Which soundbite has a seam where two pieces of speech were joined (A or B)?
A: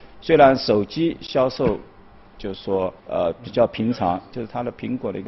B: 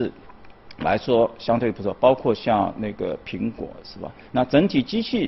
A